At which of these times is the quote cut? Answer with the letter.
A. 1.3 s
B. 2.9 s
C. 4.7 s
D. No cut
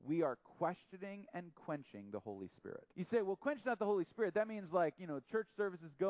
B